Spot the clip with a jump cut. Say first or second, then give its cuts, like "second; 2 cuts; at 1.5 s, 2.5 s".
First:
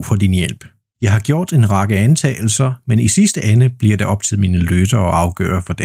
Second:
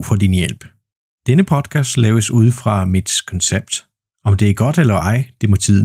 first; 1 cut; at 0.9 s